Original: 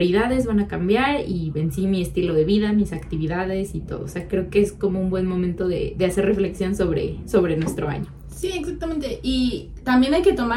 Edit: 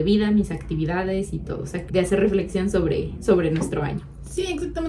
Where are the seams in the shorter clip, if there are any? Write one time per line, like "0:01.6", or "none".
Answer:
0:01.9